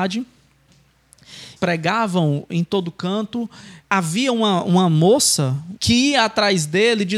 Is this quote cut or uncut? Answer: cut